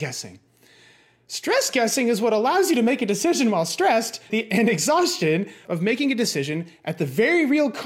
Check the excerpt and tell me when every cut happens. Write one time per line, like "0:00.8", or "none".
0:04.3
0:05.7